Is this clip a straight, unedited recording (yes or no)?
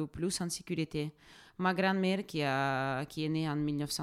yes